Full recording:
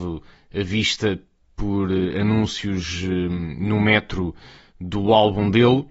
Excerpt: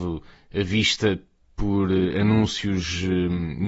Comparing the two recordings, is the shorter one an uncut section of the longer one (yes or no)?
yes